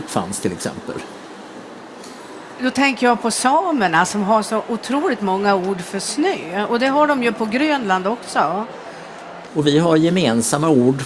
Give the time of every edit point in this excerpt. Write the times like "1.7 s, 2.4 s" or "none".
9.5 s